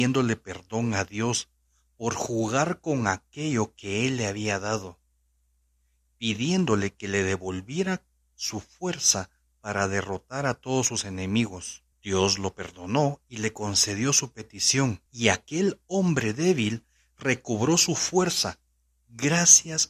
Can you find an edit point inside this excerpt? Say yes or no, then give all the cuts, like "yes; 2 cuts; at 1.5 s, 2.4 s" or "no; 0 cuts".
yes; 2 cuts; at 11.9 s, 15.1 s